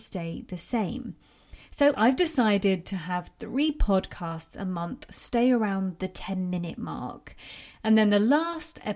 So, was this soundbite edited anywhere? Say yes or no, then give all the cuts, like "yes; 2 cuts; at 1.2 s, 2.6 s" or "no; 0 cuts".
yes; 1 cut; at 1.9 s